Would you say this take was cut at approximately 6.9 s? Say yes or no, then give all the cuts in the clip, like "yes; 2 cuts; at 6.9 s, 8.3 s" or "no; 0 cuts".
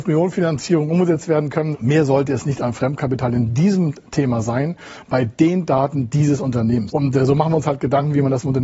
yes; 2 cuts; at 1.7 s, 6.9 s